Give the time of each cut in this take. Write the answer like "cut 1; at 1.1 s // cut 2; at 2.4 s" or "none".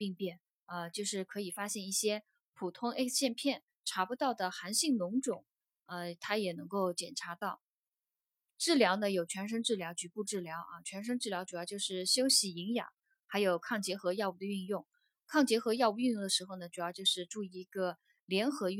none